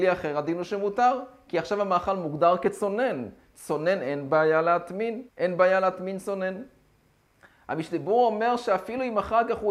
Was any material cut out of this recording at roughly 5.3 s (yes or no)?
yes